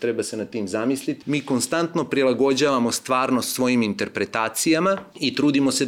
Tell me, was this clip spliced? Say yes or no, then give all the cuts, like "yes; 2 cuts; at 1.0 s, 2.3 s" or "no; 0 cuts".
yes; 1 cut; at 1.2 s